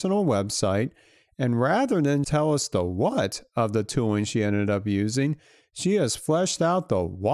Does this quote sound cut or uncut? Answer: cut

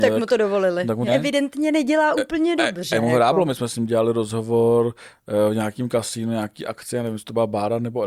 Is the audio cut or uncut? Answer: cut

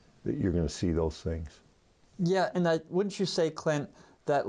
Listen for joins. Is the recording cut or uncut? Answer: uncut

